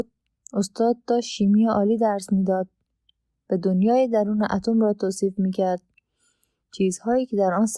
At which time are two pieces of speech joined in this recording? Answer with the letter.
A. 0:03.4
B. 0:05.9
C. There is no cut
C